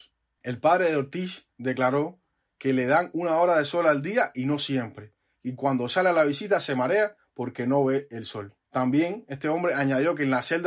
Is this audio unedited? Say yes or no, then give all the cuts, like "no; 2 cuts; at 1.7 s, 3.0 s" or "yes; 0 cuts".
no; 1 cut; at 8.6 s